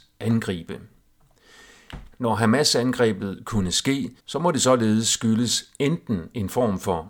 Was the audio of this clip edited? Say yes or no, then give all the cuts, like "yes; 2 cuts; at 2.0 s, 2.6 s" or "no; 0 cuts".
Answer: yes; 2 cuts; at 2.1 s, 4.2 s